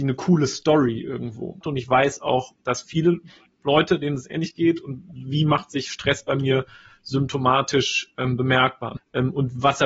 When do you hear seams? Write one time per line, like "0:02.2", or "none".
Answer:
0:01.6
0:09.0

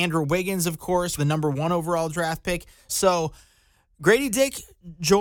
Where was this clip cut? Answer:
0:01.2
0:02.9

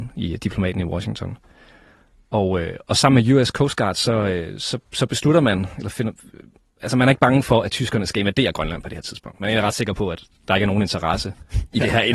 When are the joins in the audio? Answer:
none

